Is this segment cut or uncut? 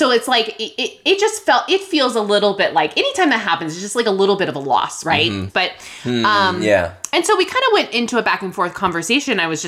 cut